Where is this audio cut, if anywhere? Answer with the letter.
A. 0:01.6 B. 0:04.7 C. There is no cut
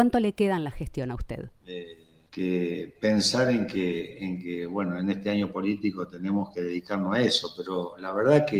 A